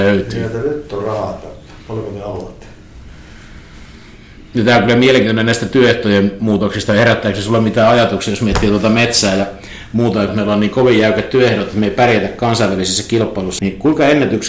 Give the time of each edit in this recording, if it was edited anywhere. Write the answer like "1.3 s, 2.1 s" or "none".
10.3 s, 13.6 s